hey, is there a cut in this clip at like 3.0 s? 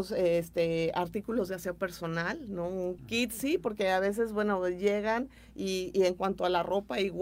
yes; 1 cut; at 3.0 s

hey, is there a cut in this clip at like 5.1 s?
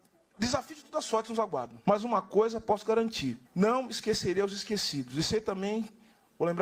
no; 2 cuts; at 1.8 s, 3.4 s

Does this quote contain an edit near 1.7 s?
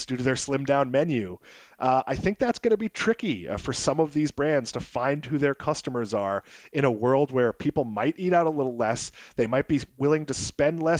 no; 0 cuts

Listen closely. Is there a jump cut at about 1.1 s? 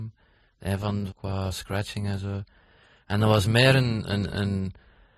yes; 1 cut; at 1.1 s

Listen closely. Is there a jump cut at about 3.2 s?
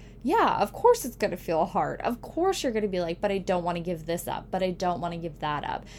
no; 0 cuts

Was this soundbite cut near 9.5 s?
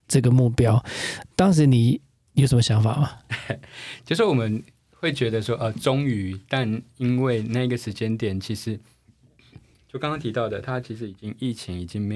no; 0 cuts

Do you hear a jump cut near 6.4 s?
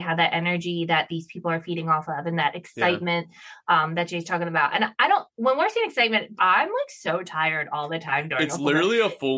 yes; 1 cut; at 6.4 s

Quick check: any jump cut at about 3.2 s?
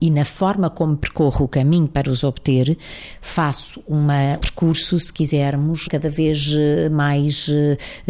no; 2 cuts; at 4.4 s, 5.8 s

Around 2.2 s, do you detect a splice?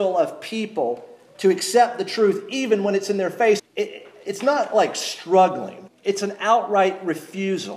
no; 2 cuts; at 3.6 s, 5.9 s

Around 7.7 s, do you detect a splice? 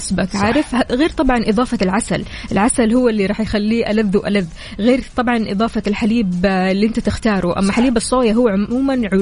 no; 0 cuts

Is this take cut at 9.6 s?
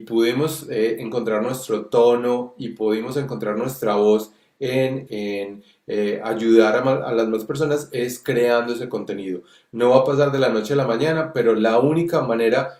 no; 1 cut; at 5.1 s

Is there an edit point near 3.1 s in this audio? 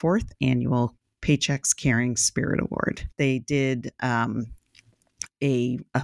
yes; 1 cut; at 3.1 s

